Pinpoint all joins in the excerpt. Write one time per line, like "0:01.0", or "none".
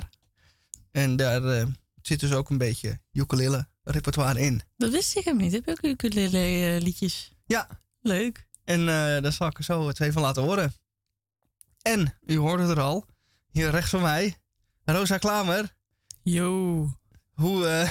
none